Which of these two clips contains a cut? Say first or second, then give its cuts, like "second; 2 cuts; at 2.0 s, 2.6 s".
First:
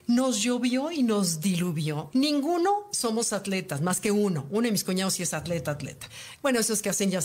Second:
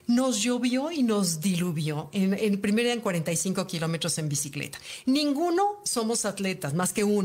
first; 1 cut; at 2.1 s